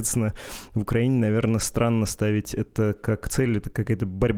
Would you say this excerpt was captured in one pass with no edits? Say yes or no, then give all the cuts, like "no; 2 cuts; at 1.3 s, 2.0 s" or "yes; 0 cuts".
yes; 0 cuts